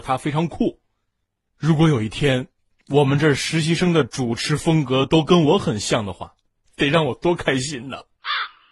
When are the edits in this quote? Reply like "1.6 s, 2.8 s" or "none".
1.5 s, 6.7 s